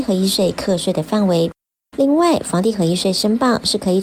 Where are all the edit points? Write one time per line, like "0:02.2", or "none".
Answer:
0:01.8